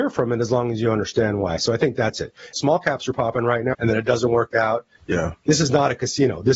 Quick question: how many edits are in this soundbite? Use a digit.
3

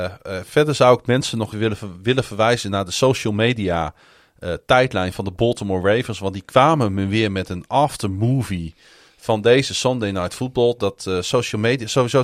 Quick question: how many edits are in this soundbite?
1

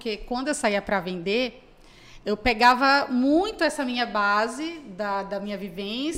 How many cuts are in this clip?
0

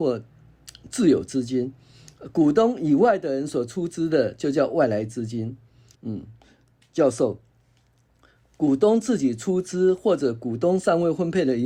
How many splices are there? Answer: 1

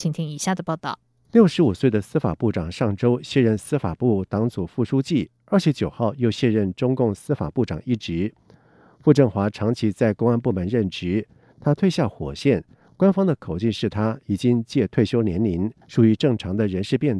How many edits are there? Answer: 1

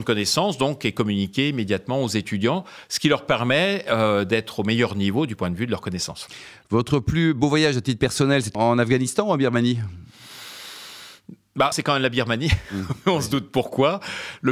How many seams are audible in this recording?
2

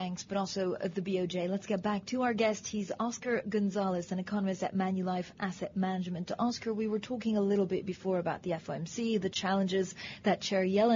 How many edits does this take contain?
0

